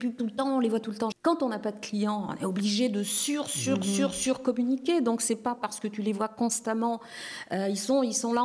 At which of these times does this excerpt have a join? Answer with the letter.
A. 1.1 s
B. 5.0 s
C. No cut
A